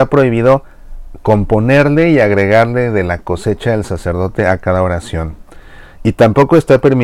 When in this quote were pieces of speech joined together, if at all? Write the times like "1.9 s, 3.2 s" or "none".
6.0 s